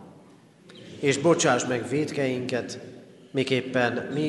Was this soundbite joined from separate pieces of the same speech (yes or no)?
no